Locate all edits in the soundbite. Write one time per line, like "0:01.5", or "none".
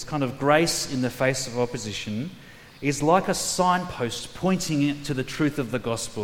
none